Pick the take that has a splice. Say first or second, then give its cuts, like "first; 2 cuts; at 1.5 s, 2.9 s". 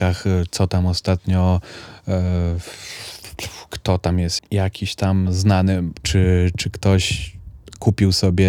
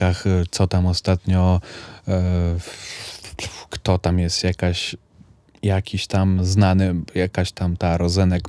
first; 2 cuts; at 4.4 s, 6.0 s